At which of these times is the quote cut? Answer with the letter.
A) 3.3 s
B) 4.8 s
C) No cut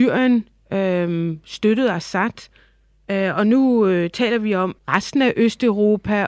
B